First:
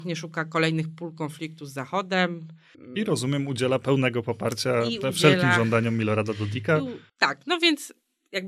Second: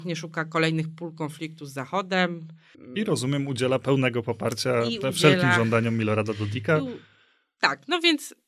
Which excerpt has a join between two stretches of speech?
first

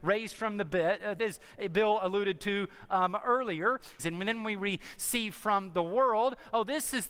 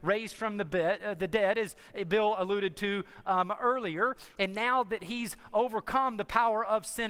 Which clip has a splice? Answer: first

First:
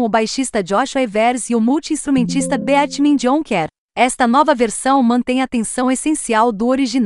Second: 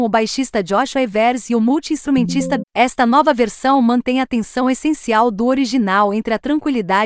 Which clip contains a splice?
second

